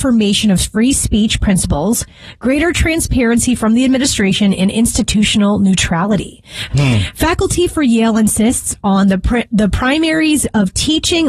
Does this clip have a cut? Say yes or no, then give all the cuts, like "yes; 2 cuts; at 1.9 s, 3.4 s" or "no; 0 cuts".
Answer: yes; 1 cut; at 6.7 s